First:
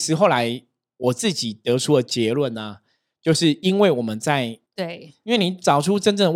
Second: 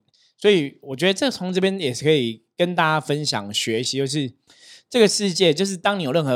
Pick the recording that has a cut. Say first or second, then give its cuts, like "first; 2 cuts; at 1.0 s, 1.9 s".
first; 1 cut; at 4.7 s